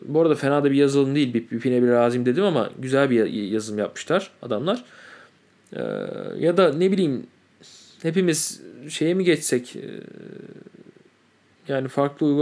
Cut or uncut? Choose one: uncut